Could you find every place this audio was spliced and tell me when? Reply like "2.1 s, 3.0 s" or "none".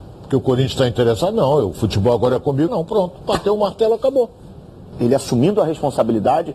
2.7 s, 4.9 s